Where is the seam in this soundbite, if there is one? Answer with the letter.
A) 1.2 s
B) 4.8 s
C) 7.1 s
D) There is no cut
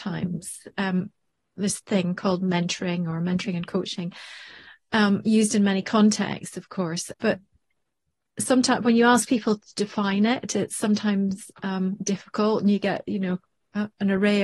C